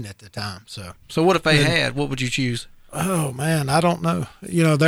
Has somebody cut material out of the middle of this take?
yes; 1 cut; at 1.0 s

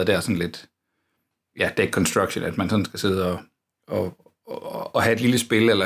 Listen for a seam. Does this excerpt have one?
no; 0 cuts

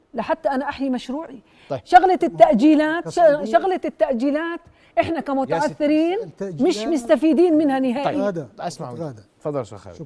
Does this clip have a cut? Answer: no; 0 cuts

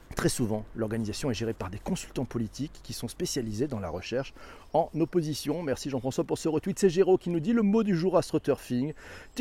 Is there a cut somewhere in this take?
no; 0 cuts

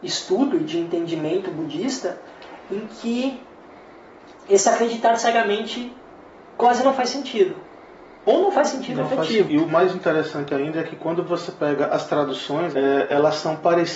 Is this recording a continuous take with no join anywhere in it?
no; 2 cuts; at 9.5 s, 12.7 s

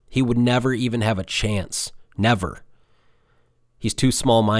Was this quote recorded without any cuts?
yes; 0 cuts

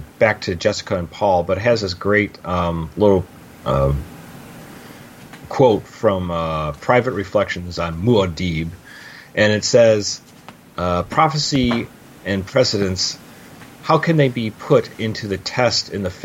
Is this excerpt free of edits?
yes; 0 cuts

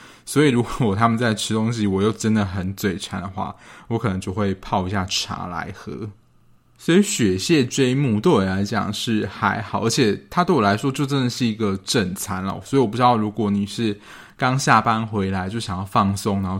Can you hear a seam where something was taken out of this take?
no; 0 cuts

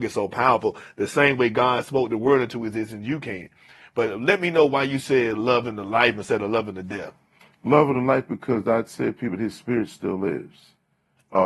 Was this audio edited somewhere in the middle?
no; 0 cuts

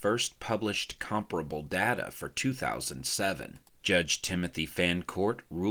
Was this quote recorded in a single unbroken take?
no; 1 cut; at 3.8 s

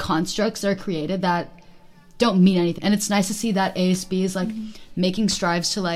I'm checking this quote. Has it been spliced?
yes; 1 cut; at 2.8 s

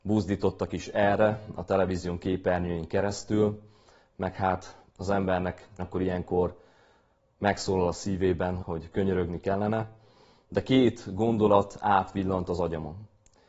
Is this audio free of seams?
no; 2 cuts; at 5.8 s, 8.6 s

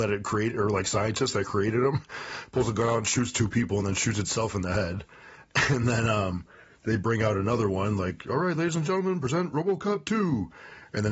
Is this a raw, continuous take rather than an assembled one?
yes; 0 cuts

